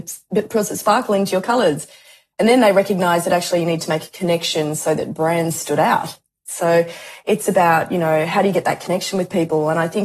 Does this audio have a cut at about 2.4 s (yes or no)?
no